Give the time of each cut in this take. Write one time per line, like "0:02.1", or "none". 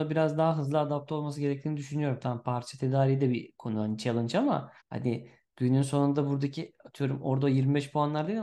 0:04.8

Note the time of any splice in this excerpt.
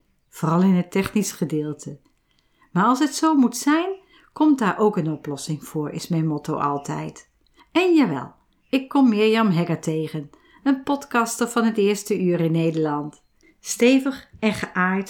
0:13.4

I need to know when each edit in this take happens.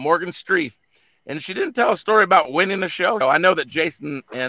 0:03.2

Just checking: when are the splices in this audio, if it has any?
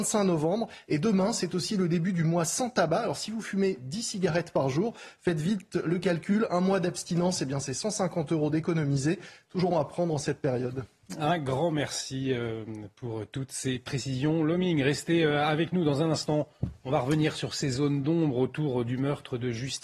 0:09.7

